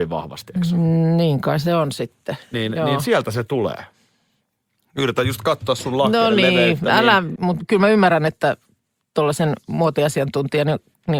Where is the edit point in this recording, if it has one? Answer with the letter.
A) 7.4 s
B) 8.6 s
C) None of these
A